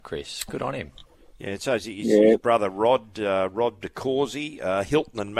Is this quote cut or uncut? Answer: uncut